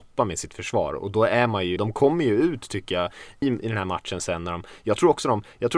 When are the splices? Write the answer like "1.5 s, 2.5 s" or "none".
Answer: 1.8 s, 3.4 s